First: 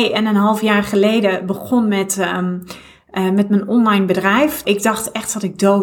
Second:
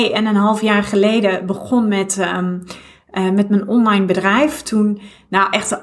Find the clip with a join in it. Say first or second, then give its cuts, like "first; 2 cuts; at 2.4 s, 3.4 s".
first; 1 cut; at 4.6 s